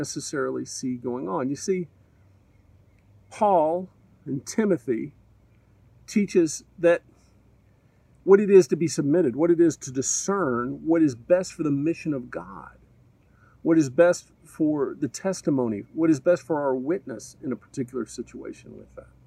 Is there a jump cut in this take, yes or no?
no